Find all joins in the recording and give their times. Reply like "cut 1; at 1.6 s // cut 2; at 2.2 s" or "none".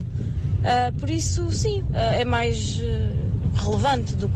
cut 1; at 1.9 s